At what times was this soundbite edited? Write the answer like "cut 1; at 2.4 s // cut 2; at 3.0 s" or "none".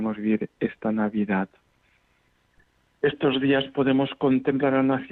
none